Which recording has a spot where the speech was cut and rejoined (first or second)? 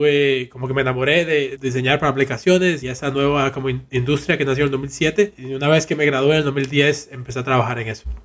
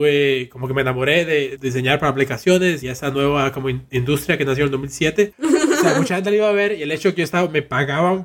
second